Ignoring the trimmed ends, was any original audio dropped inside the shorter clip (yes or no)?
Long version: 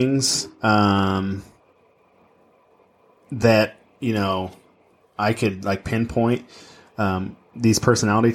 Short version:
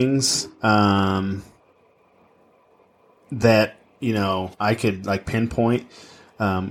yes